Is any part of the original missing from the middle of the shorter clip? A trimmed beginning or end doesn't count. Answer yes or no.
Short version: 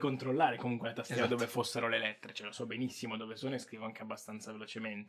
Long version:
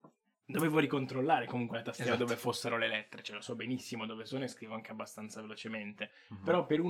no